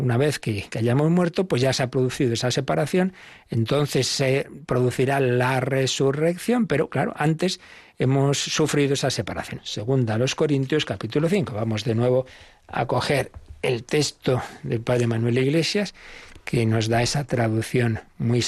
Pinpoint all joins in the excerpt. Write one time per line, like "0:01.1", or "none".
0:09.6